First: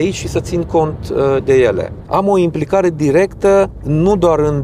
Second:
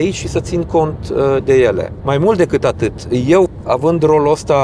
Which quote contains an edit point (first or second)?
first